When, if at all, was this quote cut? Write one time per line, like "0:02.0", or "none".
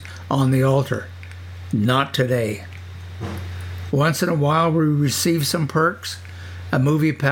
none